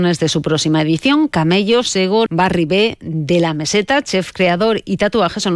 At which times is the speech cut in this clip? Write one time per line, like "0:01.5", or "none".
0:02.3